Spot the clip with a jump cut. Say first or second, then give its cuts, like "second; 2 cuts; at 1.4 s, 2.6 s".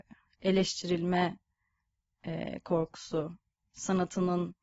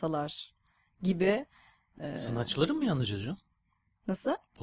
second; 1 cut; at 1.9 s